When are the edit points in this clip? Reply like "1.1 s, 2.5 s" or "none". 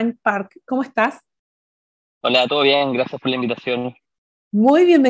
none